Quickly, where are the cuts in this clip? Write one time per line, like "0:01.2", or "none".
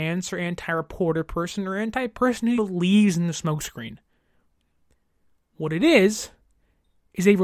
0:02.6